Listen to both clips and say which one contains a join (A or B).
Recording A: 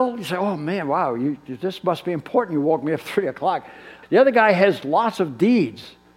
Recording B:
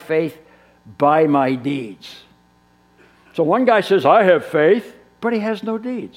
A